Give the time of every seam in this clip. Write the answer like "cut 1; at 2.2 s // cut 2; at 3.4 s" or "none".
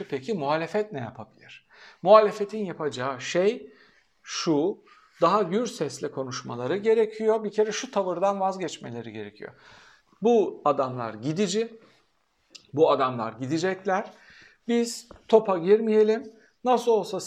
none